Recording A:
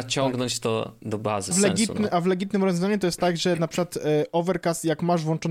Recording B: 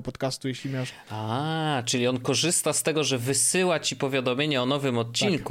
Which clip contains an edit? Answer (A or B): A